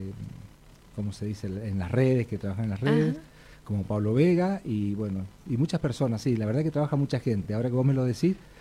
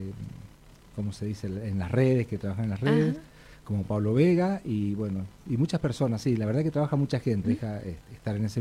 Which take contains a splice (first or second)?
second